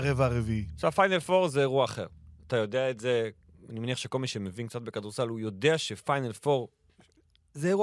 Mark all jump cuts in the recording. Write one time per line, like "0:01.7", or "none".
none